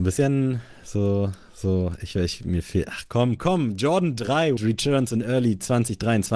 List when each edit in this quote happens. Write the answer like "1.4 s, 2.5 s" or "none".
3.4 s, 4.6 s